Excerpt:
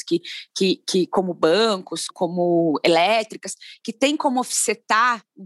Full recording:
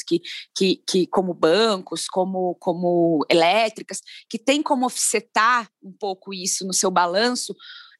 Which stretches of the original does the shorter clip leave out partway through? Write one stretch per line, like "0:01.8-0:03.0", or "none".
0:02.1-0:02.6